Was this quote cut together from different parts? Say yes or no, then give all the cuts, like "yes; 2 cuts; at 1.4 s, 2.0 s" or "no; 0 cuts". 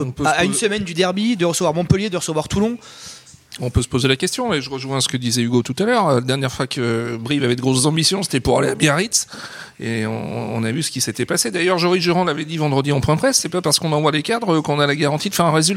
no; 0 cuts